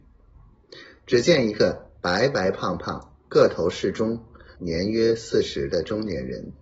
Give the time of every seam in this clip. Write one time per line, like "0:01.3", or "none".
0:04.5